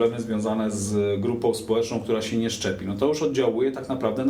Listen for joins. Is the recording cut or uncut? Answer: uncut